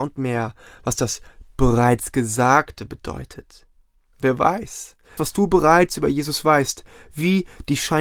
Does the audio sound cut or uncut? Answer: cut